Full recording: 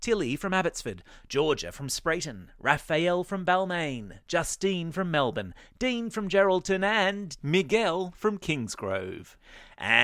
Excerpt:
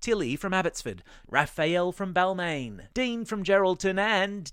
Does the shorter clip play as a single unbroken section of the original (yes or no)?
no